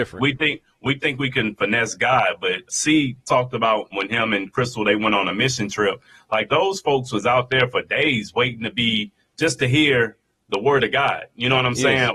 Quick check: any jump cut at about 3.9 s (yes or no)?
yes